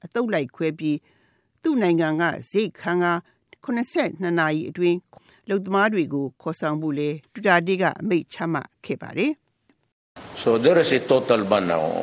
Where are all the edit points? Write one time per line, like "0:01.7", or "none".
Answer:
0:07.3

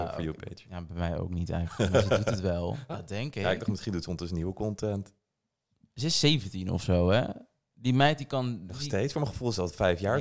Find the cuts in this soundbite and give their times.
0:02.9

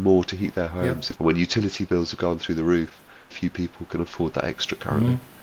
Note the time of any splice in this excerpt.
0:01.1
0:03.3

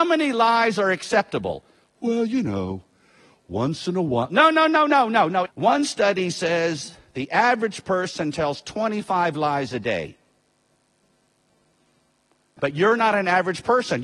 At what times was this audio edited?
0:05.5
0:12.6

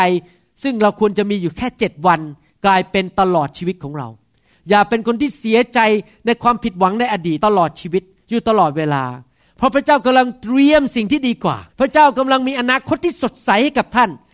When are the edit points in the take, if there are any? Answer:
0:07.4
0:11.7

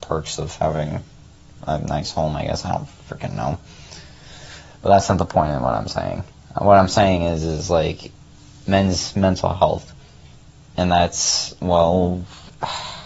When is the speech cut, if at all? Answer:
none

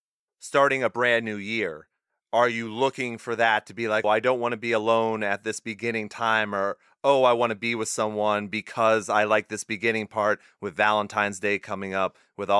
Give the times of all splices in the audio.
0:04.0

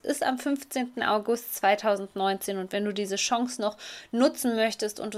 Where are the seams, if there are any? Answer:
none

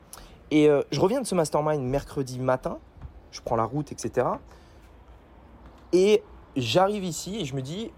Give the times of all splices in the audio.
none

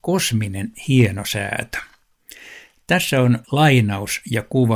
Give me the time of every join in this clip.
0:03.4

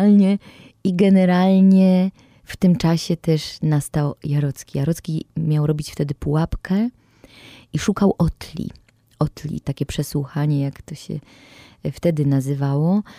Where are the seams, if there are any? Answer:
0:09.6

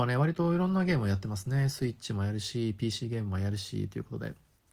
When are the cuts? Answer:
none

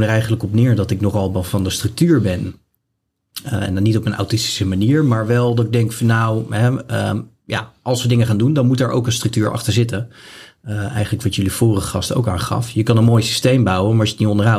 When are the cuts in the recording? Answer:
none

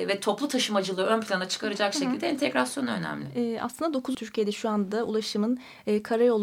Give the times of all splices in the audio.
0:04.1

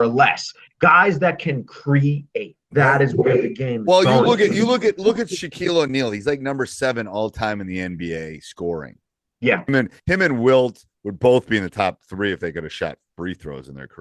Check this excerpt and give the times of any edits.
0:02.6

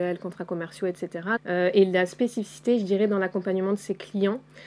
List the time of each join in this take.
0:01.4

